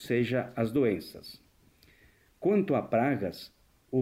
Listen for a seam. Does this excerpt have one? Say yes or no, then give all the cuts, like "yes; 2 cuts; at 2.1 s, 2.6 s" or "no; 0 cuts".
no; 0 cuts